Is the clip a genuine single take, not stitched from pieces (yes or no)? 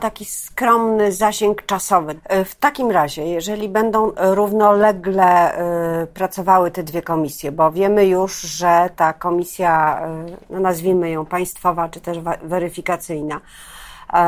no